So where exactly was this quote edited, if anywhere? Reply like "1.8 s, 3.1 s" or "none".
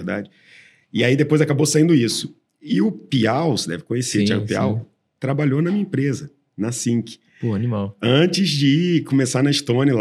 none